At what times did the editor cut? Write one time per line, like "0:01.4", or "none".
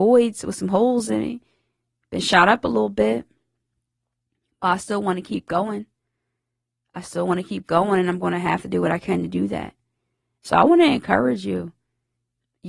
none

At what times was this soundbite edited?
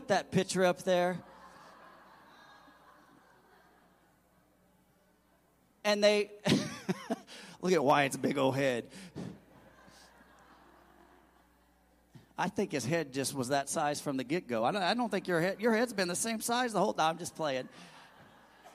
none

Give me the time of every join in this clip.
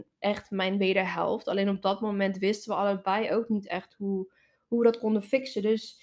none

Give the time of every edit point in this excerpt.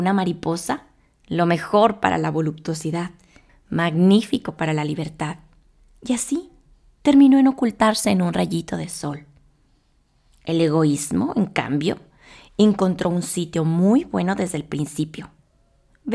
0:03.5

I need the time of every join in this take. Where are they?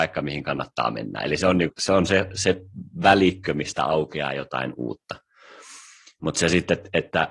0:01.7

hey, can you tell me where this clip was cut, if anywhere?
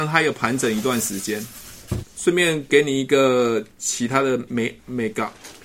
0:02.0
0:04.5

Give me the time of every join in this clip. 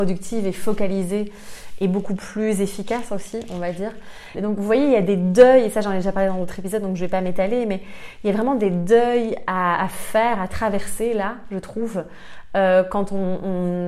0:04.3

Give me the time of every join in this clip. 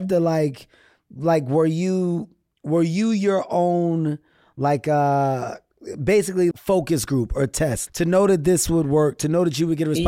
0:06.5
0:07.9

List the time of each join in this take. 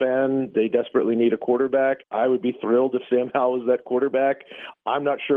0:02.0

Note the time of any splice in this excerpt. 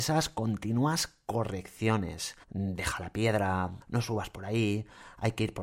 0:02.4
0:03.8

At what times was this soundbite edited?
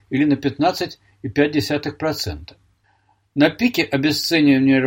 none

